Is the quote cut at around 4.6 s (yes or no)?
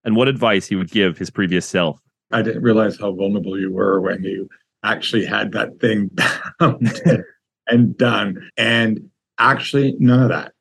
no